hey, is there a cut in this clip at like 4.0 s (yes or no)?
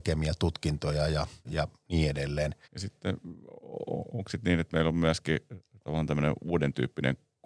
no